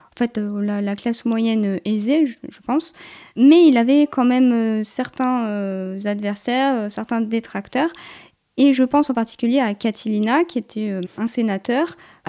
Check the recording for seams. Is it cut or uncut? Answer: uncut